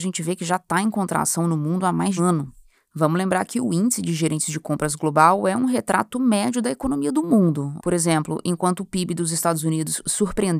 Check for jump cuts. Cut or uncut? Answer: cut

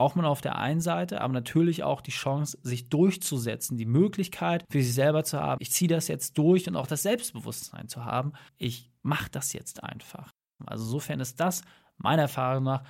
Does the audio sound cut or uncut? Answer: cut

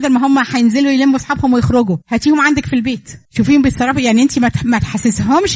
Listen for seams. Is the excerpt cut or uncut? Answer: cut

